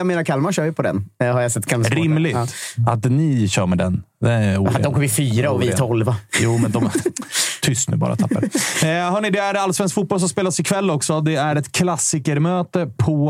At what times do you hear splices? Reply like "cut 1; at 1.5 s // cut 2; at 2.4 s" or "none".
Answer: none